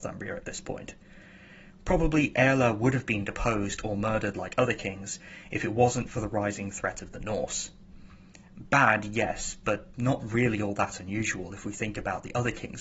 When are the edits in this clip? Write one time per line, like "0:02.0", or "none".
0:08.5